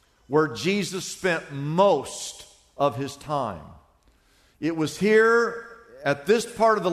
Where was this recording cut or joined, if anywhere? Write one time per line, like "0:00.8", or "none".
none

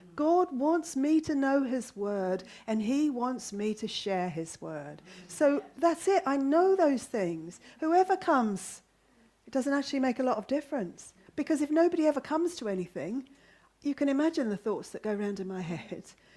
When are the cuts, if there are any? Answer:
0:11.3

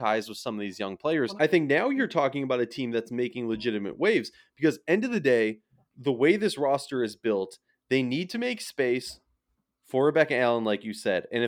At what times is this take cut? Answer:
0:01.4

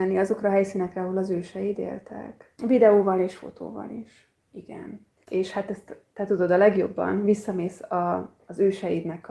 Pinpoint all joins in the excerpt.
0:02.6
0:05.2

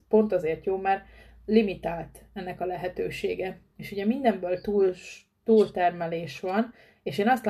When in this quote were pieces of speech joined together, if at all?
none

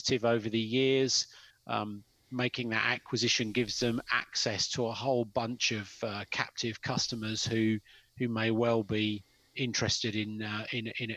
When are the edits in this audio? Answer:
0:01.5

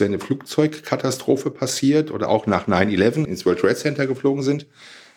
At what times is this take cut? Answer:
0:03.3

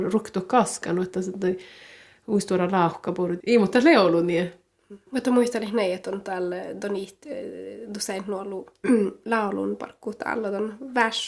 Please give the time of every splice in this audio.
0:03.4
0:05.1

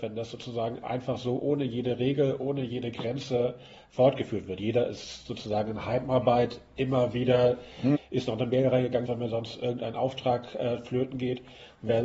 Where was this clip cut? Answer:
0:07.9
0:09.0

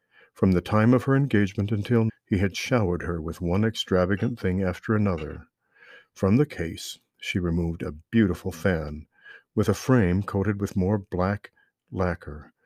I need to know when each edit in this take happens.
0:02.1

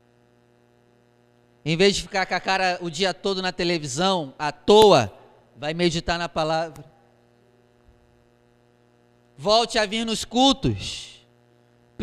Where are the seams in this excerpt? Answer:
none

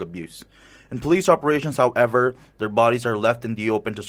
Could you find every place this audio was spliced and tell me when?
none

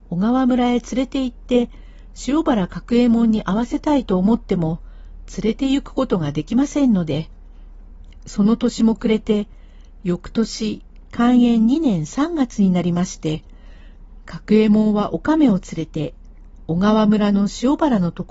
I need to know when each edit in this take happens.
none

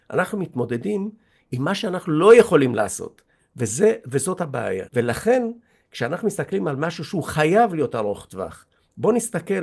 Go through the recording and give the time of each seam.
0:03.4
0:04.9

